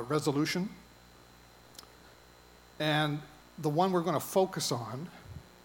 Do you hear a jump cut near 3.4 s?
yes; 1 cut; at 3.4 s

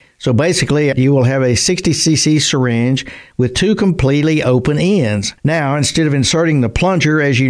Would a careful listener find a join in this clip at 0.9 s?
yes; 2 cuts; at 0.9 s, 5.4 s

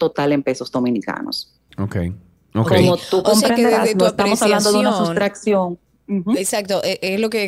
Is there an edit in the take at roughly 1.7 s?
yes; 1 cut; at 1.7 s

